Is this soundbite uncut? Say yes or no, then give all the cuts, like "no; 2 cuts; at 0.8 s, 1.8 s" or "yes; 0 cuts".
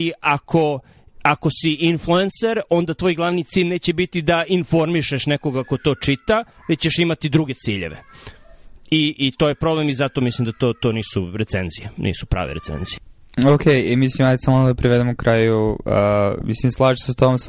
yes; 0 cuts